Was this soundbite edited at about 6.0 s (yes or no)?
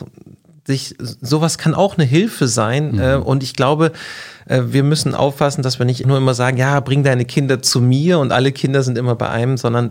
yes